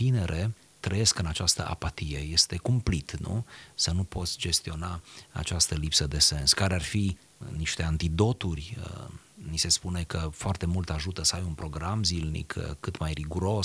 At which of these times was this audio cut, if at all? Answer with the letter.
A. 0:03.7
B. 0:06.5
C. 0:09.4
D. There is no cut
D